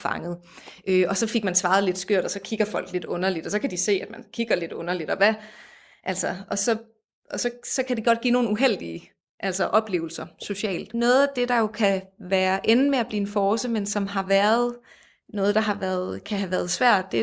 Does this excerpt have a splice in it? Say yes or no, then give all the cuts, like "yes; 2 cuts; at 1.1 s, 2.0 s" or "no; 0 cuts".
no; 0 cuts